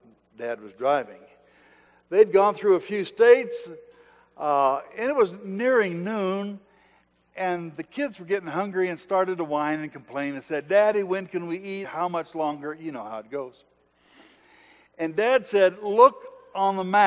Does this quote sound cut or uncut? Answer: cut